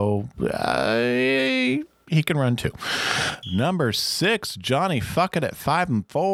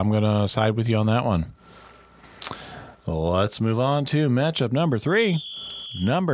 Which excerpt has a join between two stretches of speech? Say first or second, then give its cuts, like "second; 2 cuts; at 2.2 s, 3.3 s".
first; 1 cut; at 3.4 s